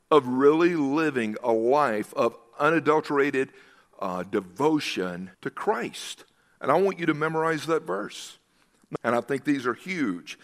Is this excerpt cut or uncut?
cut